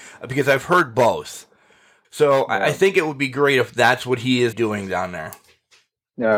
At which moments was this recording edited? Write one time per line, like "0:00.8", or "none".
0:02.0
0:04.5